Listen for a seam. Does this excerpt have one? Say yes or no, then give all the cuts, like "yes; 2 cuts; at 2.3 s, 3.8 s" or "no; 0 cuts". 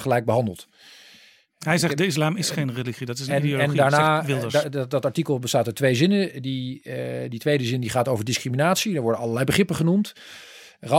no; 0 cuts